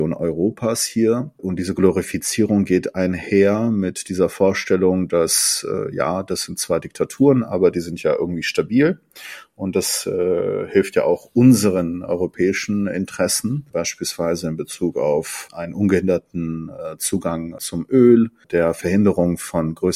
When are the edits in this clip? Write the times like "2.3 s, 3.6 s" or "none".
none

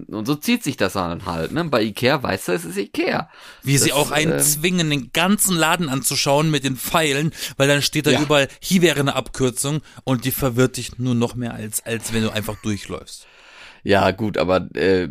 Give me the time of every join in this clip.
none

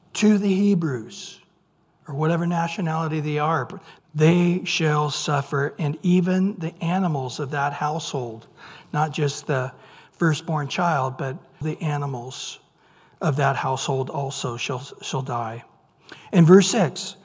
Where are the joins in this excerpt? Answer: 4.0 s, 11.6 s

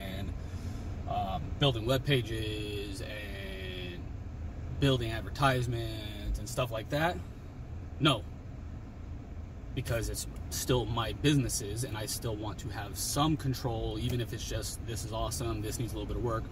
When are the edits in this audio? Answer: none

